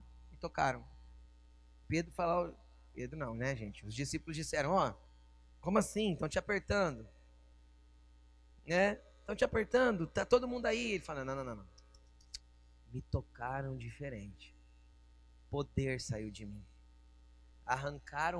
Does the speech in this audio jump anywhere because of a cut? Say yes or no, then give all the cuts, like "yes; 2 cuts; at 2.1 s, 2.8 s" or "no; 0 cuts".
no; 0 cuts